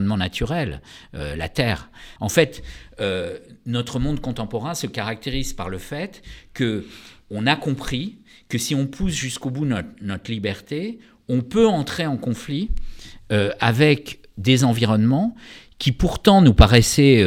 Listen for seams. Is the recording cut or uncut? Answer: cut